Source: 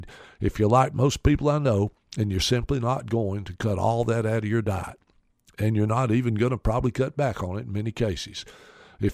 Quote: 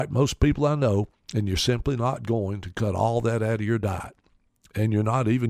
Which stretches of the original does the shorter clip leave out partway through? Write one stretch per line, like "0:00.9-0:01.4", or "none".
none